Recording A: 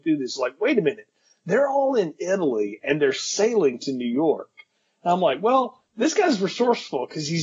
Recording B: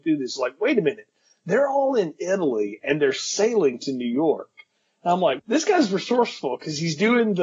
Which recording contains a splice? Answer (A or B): B